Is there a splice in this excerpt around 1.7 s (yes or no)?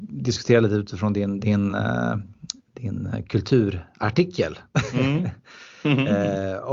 no